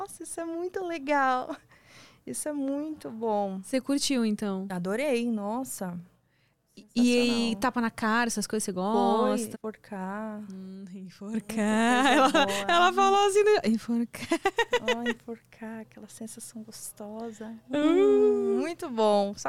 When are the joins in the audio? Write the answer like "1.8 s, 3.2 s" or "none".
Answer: 9.5 s